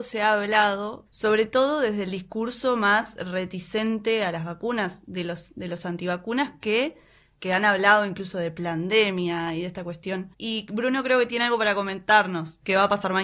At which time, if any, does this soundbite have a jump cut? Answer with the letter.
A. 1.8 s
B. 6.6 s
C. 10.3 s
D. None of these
C